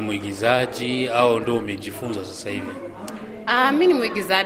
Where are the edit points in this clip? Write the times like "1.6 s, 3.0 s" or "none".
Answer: none

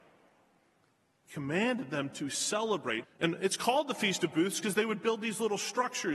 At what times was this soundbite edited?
1.2 s, 3.0 s

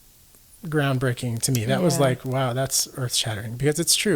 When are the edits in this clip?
none

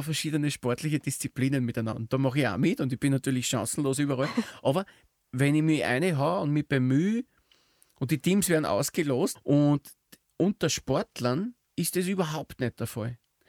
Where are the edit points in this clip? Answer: 9.4 s, 11.6 s

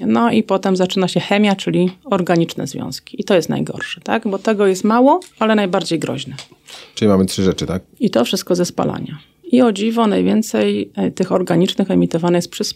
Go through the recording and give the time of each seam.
5.3 s, 7.9 s

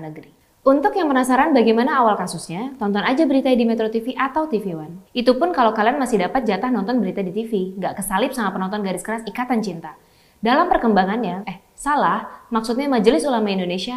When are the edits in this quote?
5.1 s, 11.4 s

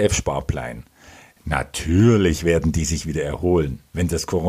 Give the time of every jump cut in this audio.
1.4 s

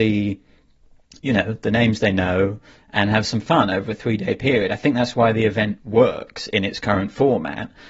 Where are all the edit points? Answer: none

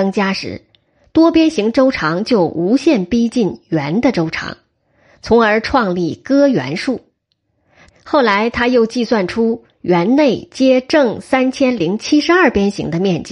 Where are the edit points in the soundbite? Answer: 7.9 s

